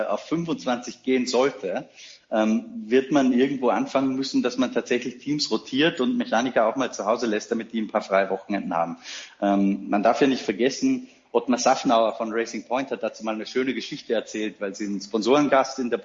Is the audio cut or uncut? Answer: uncut